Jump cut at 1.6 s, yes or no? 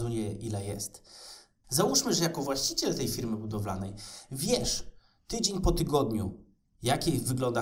yes